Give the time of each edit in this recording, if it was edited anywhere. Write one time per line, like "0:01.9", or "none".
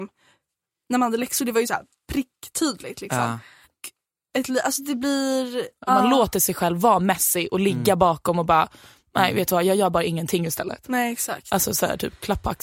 0:03.6
0:05.9